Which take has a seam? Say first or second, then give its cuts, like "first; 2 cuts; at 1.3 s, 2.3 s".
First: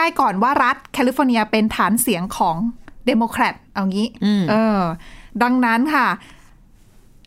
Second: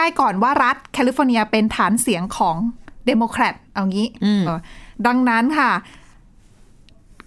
second; 1 cut; at 4.5 s